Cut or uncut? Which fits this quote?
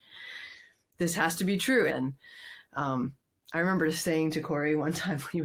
cut